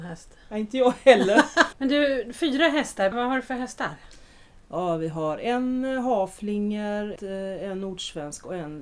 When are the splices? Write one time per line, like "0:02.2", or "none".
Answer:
0:01.7
0:03.1
0:07.2